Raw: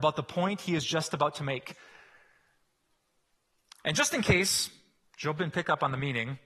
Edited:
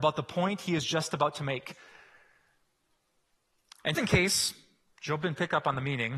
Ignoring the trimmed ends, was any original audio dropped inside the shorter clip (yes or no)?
yes